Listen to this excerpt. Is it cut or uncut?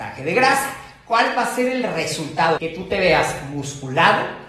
cut